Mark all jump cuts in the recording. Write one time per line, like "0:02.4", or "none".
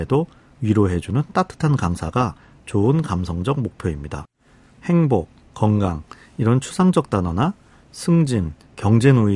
0:04.7